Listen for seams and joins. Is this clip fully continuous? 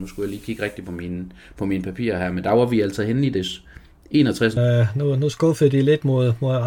no; 1 cut; at 4.6 s

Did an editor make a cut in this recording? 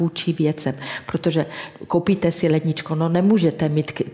no; 0 cuts

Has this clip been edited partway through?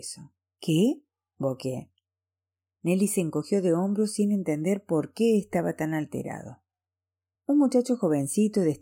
no; 0 cuts

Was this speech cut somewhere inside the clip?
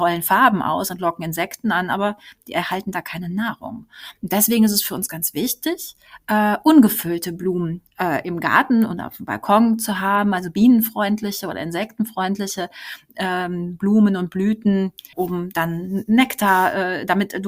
yes; 2 cuts; at 7.9 s, 15.1 s

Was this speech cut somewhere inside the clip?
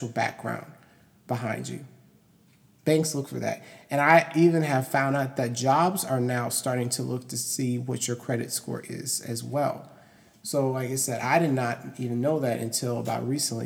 no; 0 cuts

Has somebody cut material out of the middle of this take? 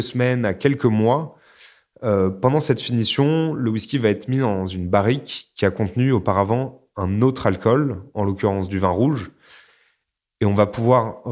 no; 0 cuts

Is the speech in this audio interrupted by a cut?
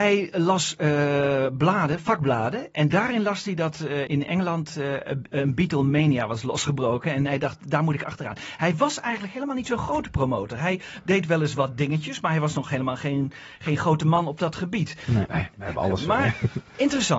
yes; 2 cuts; at 4.1 s, 15.3 s

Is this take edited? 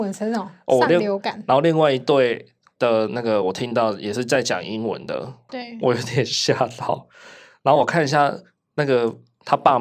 yes; 1 cut; at 5.5 s

